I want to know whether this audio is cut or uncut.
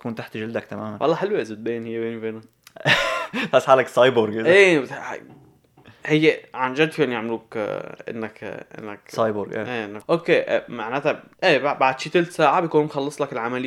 cut